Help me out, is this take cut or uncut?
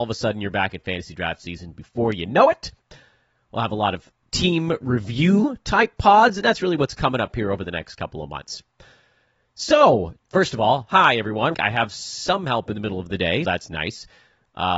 cut